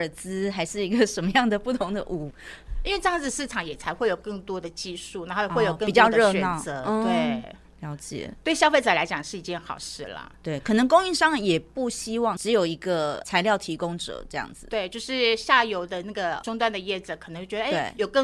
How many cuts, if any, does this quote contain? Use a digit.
0